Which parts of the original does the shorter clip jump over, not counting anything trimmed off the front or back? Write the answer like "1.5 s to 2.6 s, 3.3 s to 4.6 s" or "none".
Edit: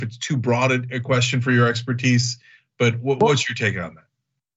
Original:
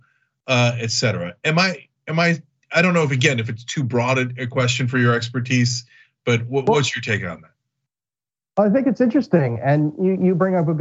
none